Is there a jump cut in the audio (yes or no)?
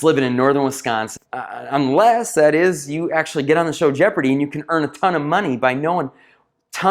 yes